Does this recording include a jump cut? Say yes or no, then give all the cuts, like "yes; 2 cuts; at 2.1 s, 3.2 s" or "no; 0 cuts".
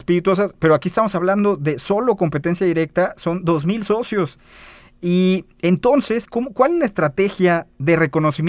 yes; 1 cut; at 6.2 s